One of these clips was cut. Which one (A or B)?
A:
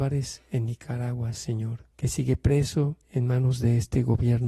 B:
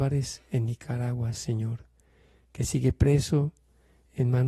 A